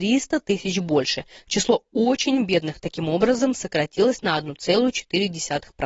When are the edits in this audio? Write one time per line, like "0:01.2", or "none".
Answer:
none